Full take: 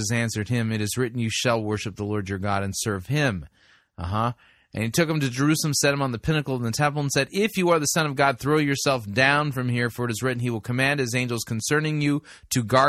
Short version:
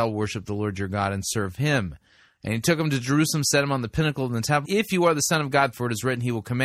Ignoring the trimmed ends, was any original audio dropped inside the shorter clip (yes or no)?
yes